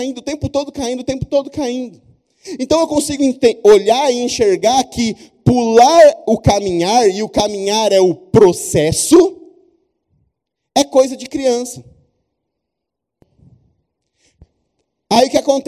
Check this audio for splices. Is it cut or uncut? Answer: uncut